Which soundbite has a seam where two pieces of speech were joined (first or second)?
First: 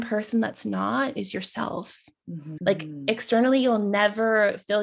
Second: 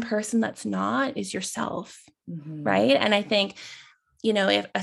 first